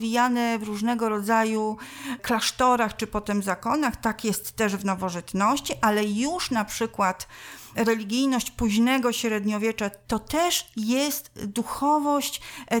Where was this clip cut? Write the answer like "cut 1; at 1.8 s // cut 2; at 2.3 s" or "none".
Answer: cut 1; at 10.0 s